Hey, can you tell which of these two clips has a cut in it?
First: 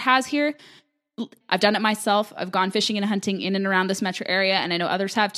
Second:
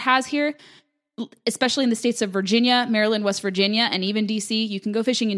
first; 1 cut; at 1.4 s

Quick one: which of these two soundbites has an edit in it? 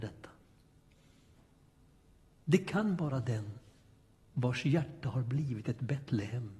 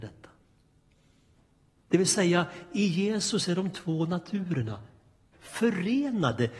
second; 2 cuts; at 1.8 s, 5.3 s

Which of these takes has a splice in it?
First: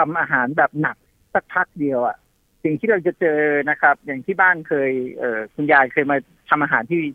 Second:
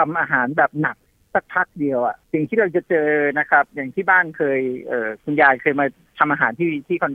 second; 1 cut; at 2.2 s

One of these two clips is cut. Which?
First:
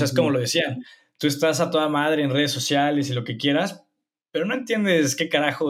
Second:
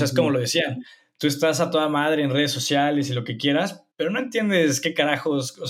second; 1 cut; at 3.9 s

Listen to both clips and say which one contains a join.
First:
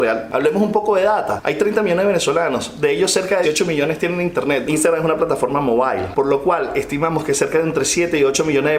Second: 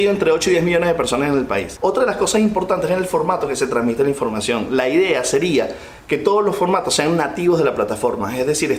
first; 2 cuts; at 3.4 s, 4.6 s

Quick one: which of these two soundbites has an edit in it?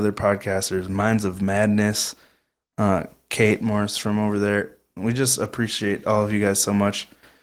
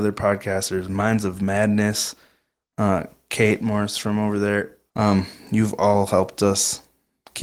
second; 1 cut; at 4.9 s

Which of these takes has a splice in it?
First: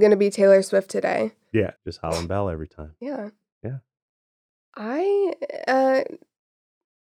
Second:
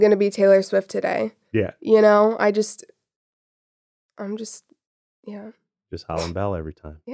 first; 2 cuts; at 1.8 s, 4.6 s

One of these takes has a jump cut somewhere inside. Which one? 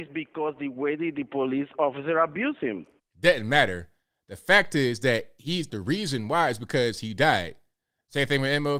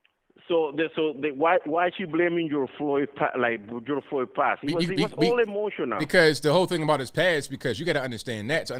first; 2 cuts; at 3.0 s, 5.7 s

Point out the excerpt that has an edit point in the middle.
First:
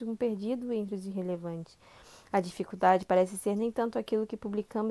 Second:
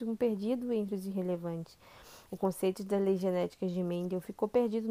second; 1 cut; at 2.3 s

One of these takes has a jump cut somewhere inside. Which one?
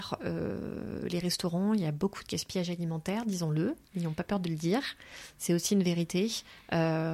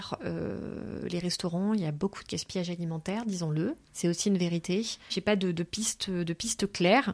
second; 2 cuts; at 3.9 s, 5.1 s

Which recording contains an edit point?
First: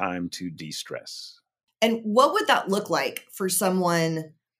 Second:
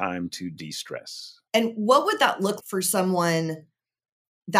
second; 2 cuts; at 1.5 s, 2.6 s

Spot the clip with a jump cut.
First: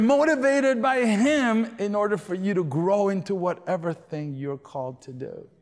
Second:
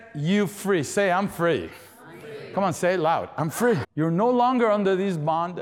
second; 1 cut; at 3.8 s

